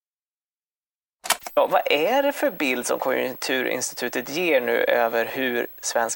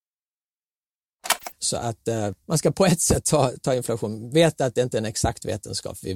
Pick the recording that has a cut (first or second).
second